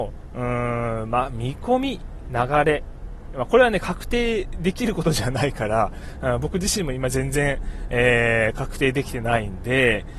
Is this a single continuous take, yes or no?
yes